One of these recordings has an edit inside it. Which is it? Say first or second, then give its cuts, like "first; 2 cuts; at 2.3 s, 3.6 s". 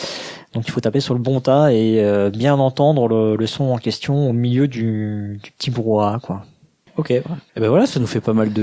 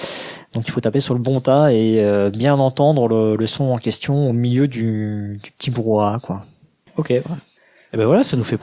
first; 1 cut; at 7.5 s